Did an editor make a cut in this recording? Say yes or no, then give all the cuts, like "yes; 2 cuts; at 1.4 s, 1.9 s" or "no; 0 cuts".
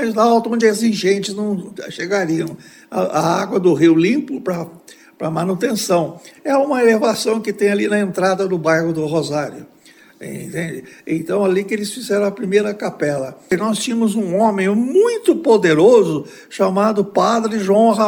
no; 0 cuts